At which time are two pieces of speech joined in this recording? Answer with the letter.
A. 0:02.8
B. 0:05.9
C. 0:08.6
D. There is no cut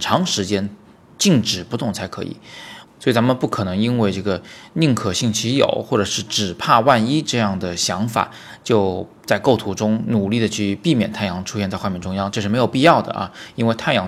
A